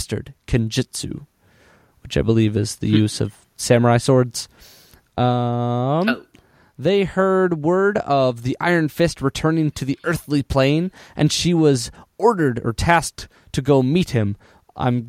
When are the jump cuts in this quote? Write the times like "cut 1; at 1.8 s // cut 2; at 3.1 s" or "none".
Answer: none